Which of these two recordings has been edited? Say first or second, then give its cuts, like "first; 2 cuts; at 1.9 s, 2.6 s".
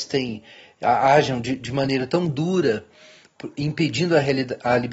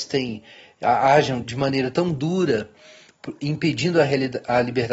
second; 1 cut; at 1.4 s